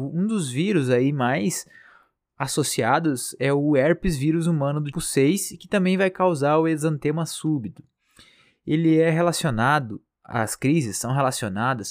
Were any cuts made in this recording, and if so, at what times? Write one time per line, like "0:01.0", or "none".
0:04.9